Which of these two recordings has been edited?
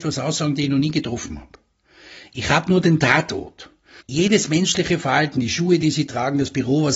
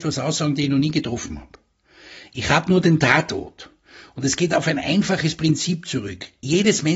first; 1 cut; at 4.0 s

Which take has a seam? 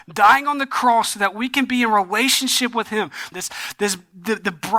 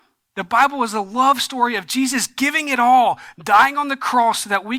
first; 1 cut; at 3.3 s

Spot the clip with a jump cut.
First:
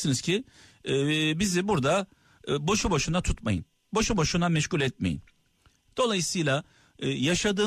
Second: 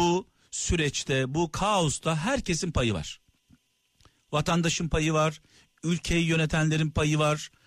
first; 1 cut; at 5.9 s

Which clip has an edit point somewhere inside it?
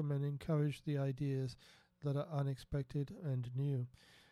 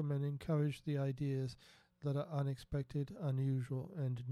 first; 1 cut; at 3.2 s

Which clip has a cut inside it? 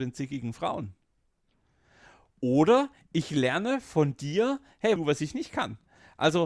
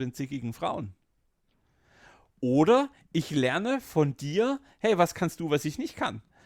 first; 1 cut; at 5.0 s

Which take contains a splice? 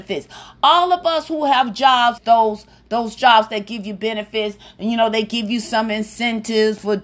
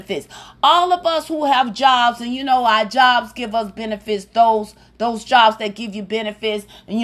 first; 1 cut; at 2.2 s

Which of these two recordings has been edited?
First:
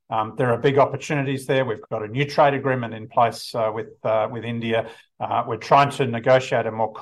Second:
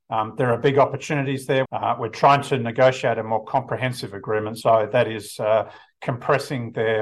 second; 2 cuts; at 1.7 s, 4.6 s

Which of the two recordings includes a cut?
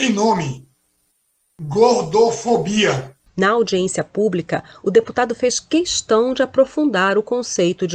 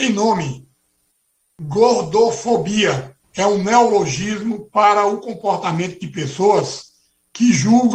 second; 1 cut; at 3.2 s

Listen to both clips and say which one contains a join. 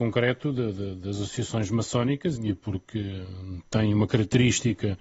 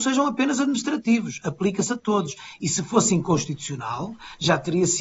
first; 1 cut; at 2.4 s

